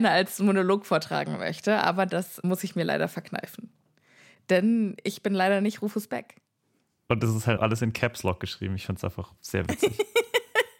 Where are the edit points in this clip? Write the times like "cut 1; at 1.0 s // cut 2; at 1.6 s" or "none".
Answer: cut 1; at 7.6 s